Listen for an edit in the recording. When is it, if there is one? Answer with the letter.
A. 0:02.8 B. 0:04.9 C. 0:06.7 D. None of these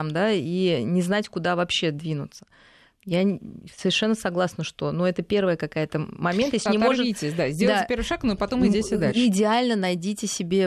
C